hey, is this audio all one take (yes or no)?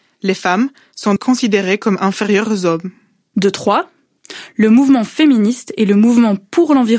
no